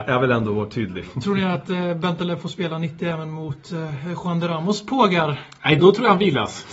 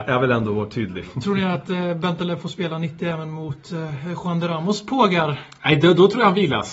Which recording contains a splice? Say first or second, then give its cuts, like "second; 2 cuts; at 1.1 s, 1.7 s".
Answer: first; 1 cut; at 5.8 s